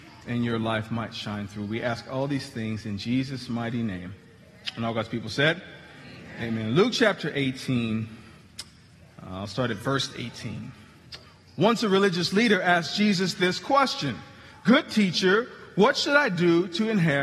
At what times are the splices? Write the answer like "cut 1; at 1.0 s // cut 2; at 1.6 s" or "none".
none